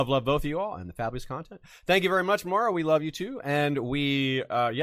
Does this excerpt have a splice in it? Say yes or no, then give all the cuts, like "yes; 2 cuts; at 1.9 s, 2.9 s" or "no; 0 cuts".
no; 0 cuts